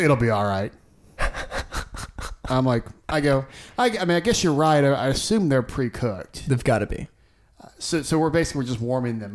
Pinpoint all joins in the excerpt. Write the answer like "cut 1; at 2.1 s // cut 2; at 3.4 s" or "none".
none